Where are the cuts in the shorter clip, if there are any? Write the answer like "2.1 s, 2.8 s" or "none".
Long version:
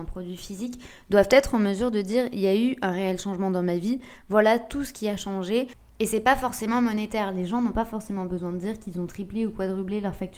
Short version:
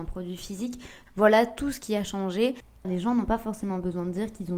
1.1 s, 2.8 s